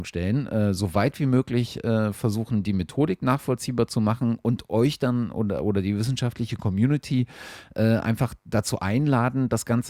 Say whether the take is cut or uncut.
uncut